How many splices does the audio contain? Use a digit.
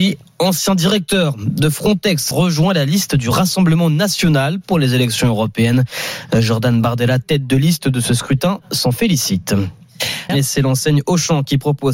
2